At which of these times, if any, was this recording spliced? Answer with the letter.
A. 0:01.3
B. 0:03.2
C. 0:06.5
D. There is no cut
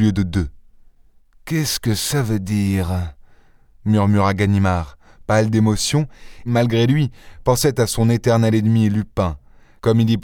C